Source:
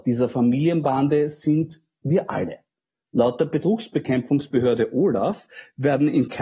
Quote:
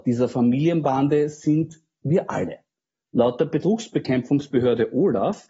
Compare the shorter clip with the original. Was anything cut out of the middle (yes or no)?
no